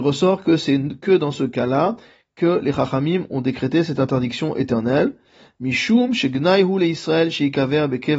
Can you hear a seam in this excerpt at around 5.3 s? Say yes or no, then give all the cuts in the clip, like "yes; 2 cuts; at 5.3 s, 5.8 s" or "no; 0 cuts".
no; 0 cuts